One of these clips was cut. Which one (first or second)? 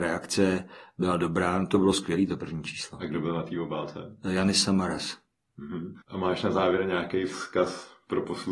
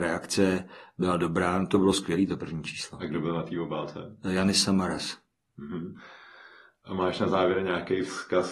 first